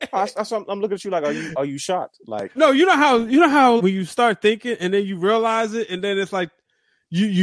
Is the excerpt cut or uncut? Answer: cut